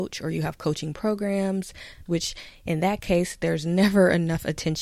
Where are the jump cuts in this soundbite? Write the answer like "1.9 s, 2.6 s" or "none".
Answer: 2.1 s